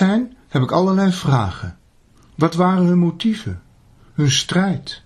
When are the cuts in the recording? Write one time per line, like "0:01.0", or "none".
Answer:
0:02.2